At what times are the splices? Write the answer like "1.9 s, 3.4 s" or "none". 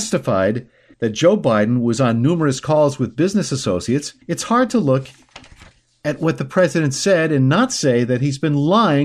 0.9 s, 4.2 s

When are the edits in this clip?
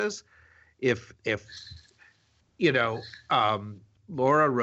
1.2 s

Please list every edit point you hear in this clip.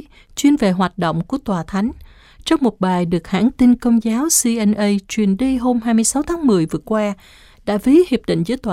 none

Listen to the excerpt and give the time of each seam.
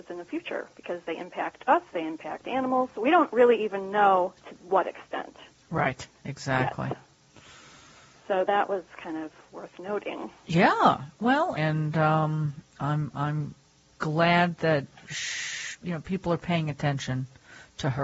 11.6 s

